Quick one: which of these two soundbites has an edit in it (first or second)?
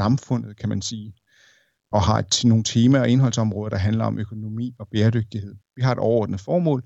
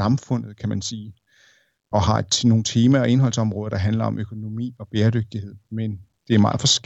first